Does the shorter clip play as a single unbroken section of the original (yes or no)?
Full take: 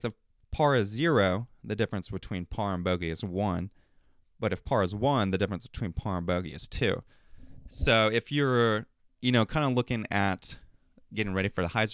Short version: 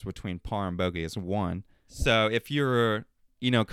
no